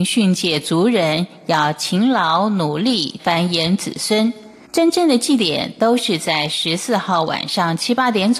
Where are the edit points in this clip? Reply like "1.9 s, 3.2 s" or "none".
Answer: 3.2 s, 4.6 s